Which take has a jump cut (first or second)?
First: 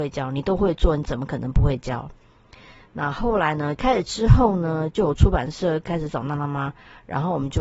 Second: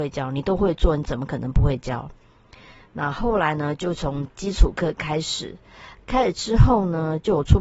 first